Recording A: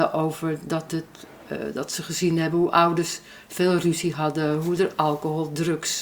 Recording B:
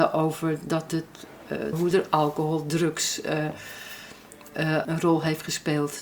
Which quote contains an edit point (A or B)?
B